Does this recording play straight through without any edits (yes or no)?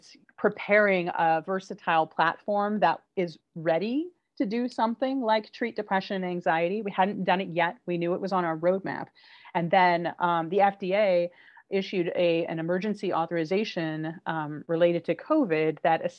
yes